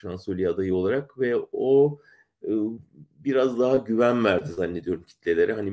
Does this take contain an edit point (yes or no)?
no